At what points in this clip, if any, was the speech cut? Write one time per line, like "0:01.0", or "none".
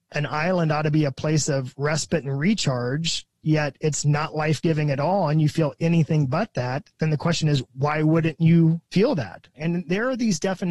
0:09.5